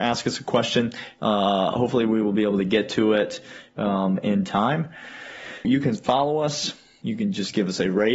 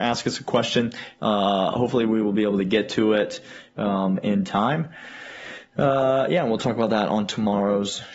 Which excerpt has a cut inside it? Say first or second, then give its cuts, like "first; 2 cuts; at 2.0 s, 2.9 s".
first; 2 cuts; at 5.6 s, 7.0 s